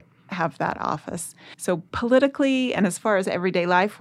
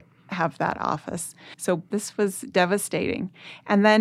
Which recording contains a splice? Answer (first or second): second